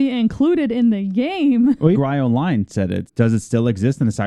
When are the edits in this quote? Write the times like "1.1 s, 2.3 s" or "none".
1.9 s, 3.1 s